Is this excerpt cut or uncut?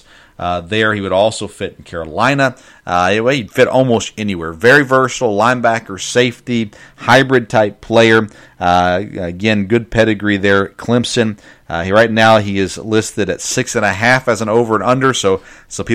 uncut